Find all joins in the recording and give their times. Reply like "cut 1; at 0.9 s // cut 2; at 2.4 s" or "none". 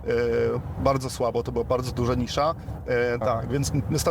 cut 1; at 3.2 s